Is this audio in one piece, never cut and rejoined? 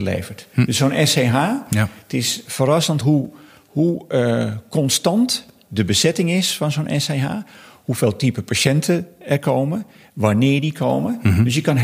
yes; 0 cuts

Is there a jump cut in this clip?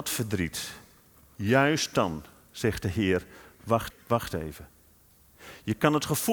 yes; 1 cut; at 3.9 s

